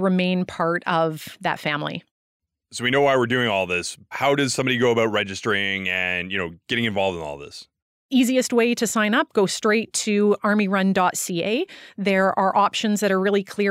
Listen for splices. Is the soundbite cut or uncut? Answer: uncut